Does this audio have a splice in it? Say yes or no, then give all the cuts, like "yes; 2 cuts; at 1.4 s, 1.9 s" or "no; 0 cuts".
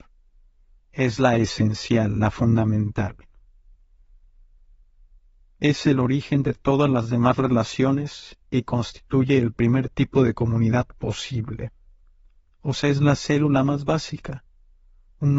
no; 0 cuts